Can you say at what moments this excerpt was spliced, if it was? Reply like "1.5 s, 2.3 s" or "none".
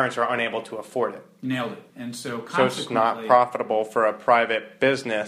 1.9 s